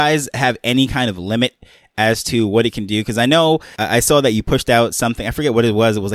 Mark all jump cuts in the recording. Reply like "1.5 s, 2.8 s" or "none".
none

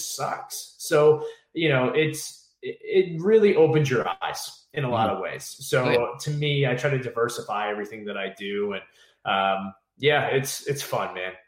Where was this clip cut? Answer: none

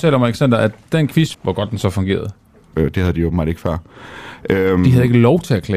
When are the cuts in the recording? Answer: 1.3 s, 2.7 s

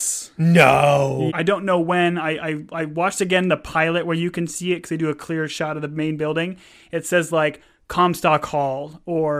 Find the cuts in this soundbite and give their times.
1.3 s

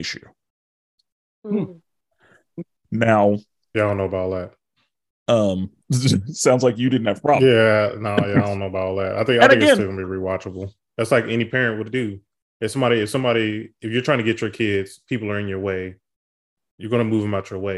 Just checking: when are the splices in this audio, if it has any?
10.9 s

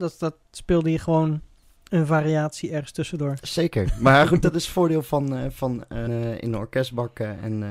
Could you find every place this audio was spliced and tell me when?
6.1 s

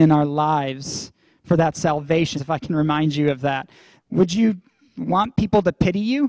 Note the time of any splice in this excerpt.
2.4 s, 4.0 s

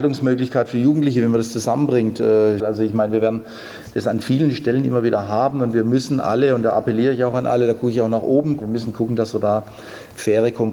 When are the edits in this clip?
2.6 s, 8.6 s

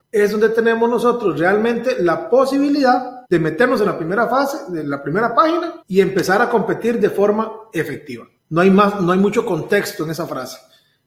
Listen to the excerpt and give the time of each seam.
3.2 s, 5.8 s, 8.4 s

